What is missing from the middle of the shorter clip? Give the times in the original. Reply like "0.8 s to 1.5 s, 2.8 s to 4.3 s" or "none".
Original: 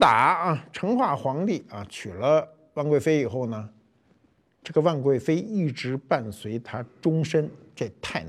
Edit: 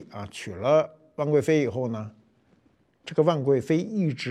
none